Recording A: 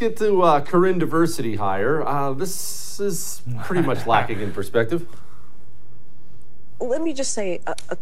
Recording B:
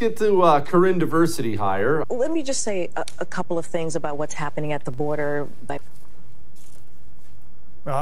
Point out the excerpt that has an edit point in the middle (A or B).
B